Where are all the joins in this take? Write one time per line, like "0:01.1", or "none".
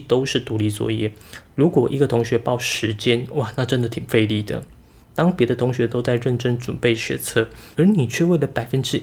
0:07.7